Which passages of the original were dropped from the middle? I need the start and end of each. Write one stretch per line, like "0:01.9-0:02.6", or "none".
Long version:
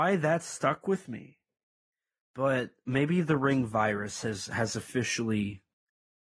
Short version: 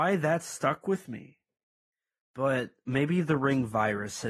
none